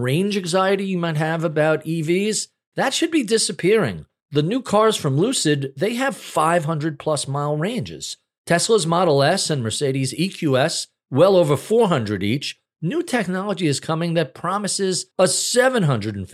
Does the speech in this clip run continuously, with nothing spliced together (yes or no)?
yes